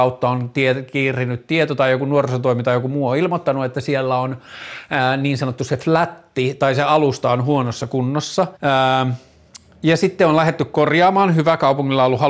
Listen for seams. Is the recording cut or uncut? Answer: cut